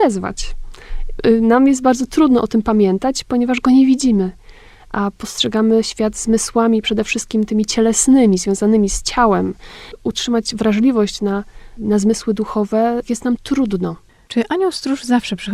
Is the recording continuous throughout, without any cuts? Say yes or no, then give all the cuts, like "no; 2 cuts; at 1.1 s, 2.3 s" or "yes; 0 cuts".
yes; 0 cuts